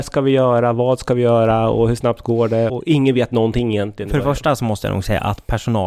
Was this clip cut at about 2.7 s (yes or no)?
yes